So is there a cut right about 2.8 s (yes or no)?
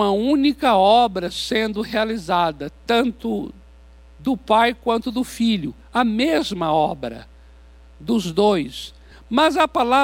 no